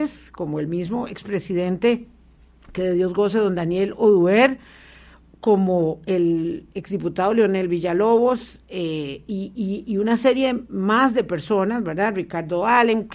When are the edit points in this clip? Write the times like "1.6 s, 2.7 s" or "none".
none